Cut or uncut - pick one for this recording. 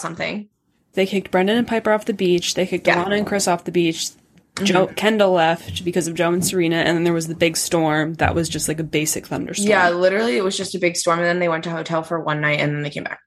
cut